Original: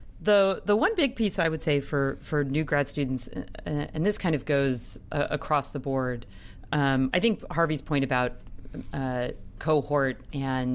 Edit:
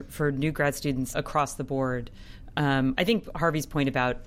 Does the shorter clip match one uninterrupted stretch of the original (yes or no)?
no